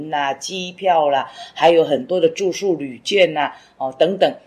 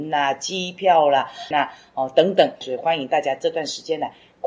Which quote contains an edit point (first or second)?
second